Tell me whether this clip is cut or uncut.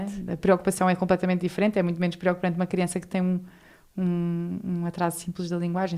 uncut